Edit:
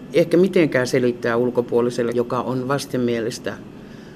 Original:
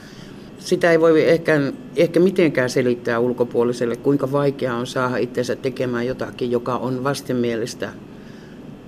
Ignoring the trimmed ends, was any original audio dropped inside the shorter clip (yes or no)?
yes